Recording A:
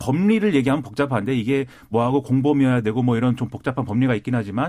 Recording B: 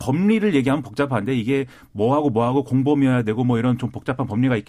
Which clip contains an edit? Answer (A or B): A